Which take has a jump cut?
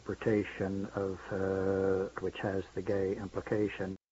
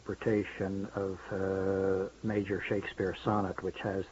first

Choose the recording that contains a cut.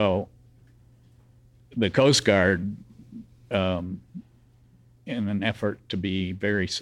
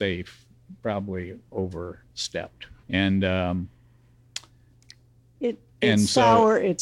second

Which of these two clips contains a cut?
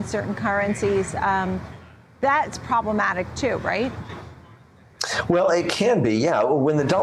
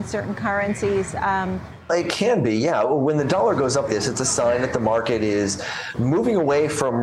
second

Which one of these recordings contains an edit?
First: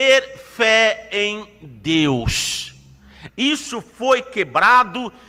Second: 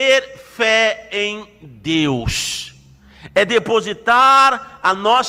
first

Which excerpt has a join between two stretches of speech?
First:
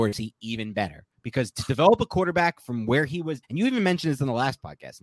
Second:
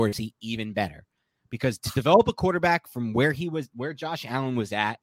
first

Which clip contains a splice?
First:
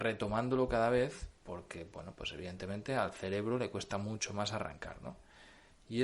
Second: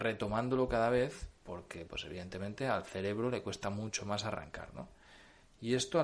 second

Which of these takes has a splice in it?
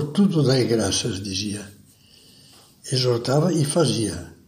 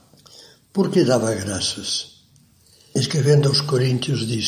second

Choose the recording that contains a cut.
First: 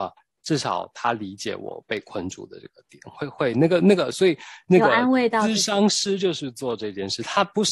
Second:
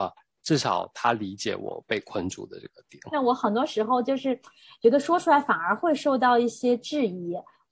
second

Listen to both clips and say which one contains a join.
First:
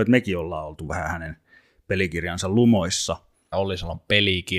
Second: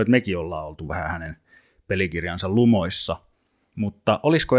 first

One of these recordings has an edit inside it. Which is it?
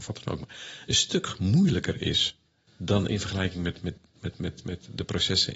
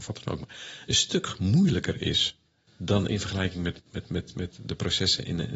second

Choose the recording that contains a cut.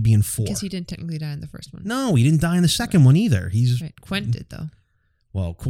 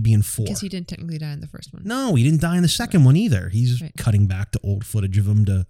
second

